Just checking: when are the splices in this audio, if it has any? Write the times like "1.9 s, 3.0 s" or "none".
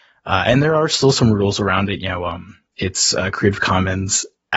none

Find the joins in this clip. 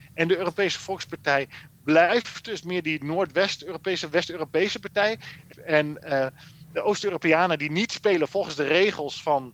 none

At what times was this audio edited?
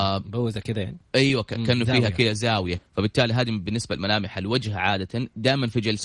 2.7 s

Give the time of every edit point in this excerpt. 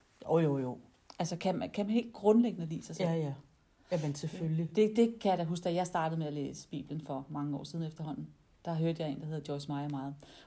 none

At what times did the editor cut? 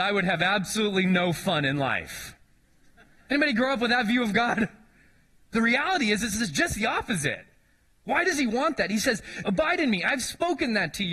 5.5 s, 9.4 s

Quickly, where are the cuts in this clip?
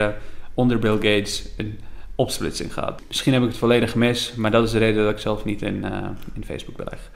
3.0 s

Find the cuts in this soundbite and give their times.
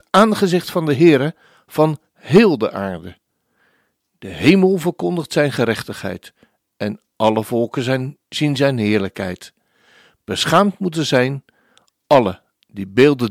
none

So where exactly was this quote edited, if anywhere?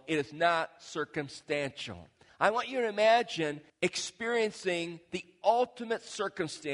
2.3 s, 3.7 s

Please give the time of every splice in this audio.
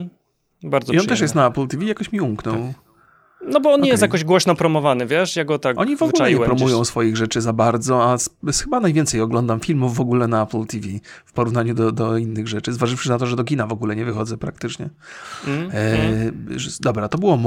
none

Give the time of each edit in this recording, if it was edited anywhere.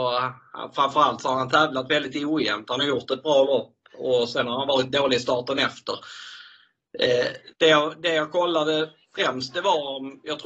7.5 s

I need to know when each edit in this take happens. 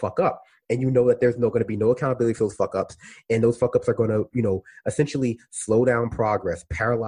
none

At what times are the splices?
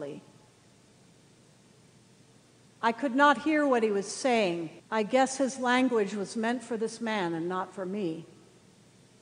4.8 s

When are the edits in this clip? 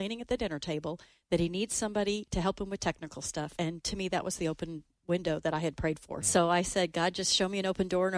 3.6 s, 6.2 s

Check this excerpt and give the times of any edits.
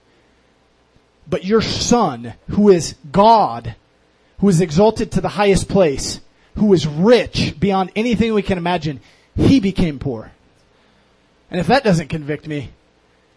none

